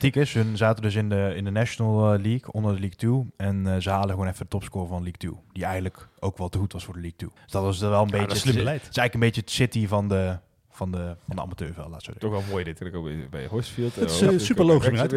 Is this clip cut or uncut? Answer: cut